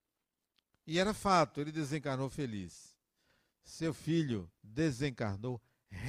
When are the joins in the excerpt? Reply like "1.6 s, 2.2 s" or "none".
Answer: 4.5 s